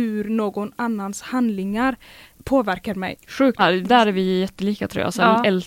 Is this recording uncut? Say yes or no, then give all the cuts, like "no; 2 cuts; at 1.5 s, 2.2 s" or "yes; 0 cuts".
no; 1 cut; at 3.6 s